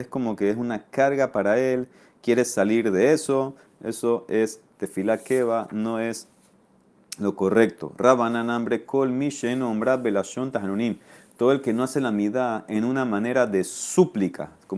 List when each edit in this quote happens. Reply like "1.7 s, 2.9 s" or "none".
none